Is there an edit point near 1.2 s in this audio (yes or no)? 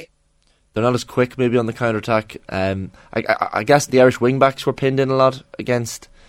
no